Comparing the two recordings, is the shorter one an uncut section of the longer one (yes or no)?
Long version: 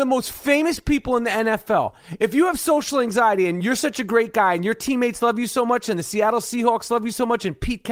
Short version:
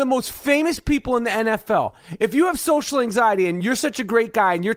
yes